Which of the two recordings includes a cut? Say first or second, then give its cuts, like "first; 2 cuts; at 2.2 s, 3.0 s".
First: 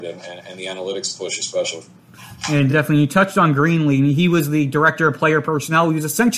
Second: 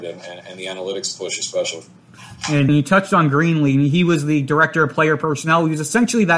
second; 1 cut; at 2.7 s